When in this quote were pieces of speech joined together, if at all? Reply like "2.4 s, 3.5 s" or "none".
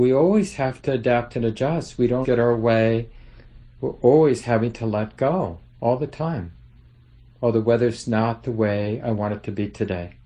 2.2 s